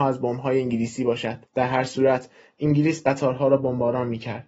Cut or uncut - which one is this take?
cut